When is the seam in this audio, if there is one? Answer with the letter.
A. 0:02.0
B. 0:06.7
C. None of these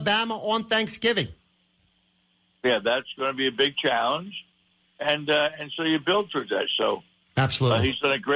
B